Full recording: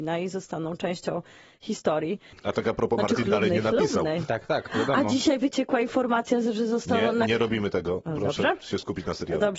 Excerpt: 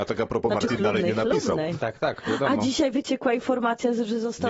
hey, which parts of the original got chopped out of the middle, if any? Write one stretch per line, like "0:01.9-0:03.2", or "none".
none